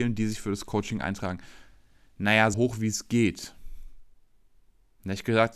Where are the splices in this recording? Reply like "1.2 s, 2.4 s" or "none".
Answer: 2.5 s